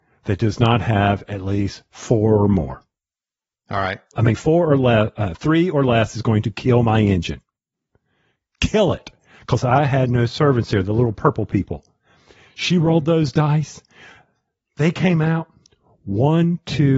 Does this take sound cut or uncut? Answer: cut